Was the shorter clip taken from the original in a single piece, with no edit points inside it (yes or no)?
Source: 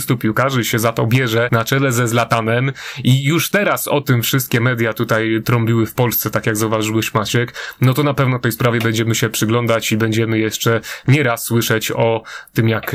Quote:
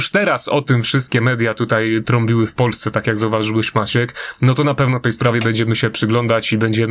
yes